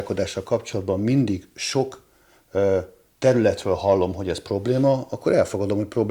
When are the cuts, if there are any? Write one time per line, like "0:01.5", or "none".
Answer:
none